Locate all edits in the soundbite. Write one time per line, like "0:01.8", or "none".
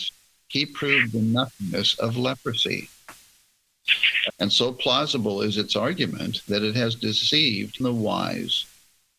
0:04.3
0:07.8